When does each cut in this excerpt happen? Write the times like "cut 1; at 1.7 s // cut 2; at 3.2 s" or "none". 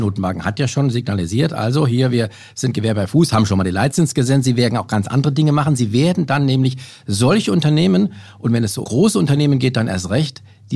cut 1; at 8.8 s

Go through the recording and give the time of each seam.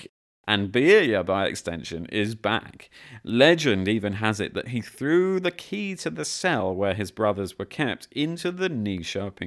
none

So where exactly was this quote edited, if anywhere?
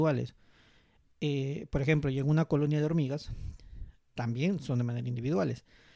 cut 1; at 4.1 s

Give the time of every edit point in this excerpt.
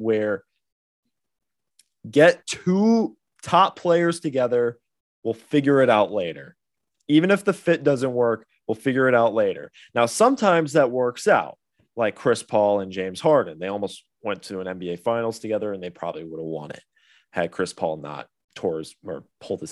none

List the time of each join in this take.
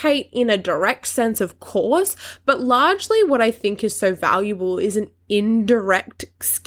none

